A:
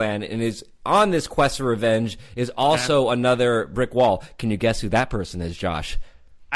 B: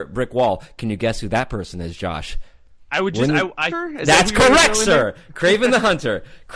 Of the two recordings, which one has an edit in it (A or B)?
B